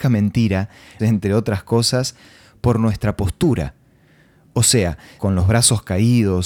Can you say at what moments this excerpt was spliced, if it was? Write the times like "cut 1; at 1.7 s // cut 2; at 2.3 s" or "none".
cut 1; at 1.0 s // cut 2; at 5.2 s